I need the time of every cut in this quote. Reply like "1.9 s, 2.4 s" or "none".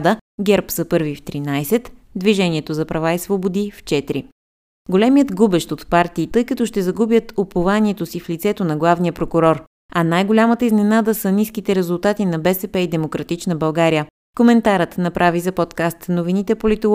6.3 s